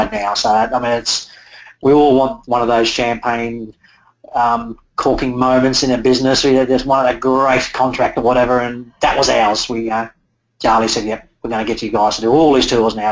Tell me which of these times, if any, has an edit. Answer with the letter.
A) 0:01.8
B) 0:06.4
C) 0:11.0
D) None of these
D